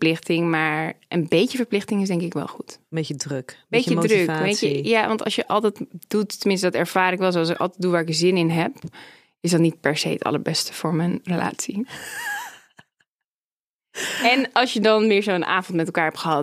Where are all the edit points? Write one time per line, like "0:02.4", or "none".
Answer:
none